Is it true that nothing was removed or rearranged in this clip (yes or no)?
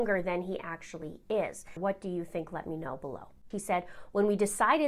no